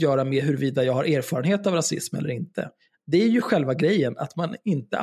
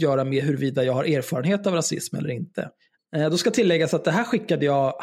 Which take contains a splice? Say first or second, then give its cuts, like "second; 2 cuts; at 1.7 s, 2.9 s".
second; 1 cut; at 3.0 s